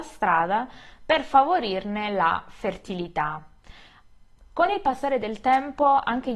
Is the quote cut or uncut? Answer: cut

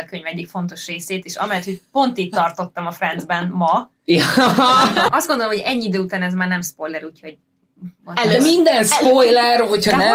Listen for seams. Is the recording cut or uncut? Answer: cut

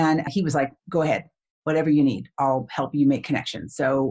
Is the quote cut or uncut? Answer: uncut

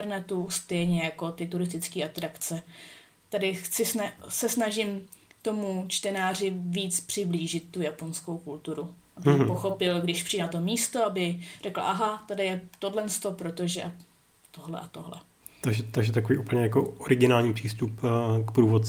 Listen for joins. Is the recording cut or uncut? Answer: uncut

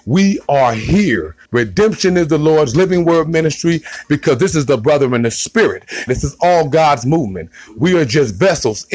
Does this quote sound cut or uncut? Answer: cut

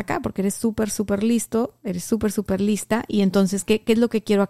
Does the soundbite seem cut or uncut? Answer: uncut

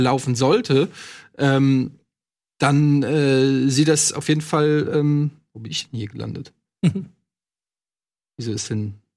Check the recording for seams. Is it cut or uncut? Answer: uncut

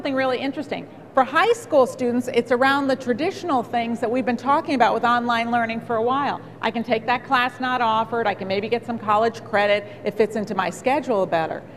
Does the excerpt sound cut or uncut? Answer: uncut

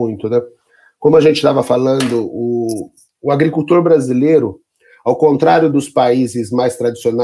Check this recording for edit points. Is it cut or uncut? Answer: uncut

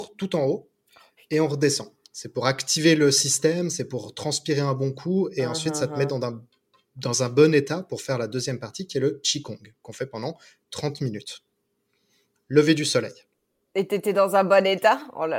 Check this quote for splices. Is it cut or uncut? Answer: uncut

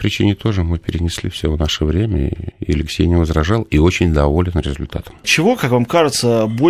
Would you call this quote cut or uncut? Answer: cut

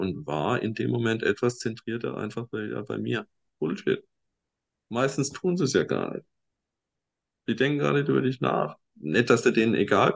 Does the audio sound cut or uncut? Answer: cut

